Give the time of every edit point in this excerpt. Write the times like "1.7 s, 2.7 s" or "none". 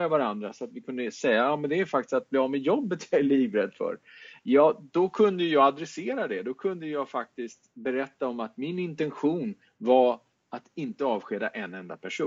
none